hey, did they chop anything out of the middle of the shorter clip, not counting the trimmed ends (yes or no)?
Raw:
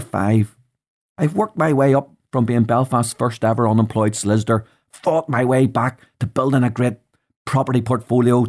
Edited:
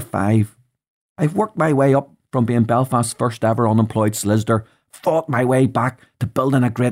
no